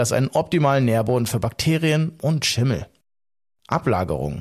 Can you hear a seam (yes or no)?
no